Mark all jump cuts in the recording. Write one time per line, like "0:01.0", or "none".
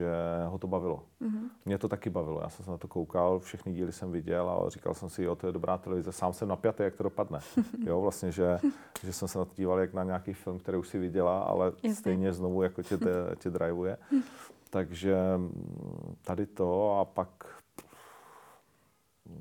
none